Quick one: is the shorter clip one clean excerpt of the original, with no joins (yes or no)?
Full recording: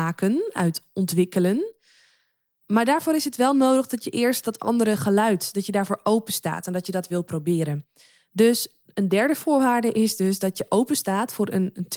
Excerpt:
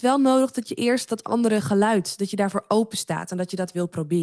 yes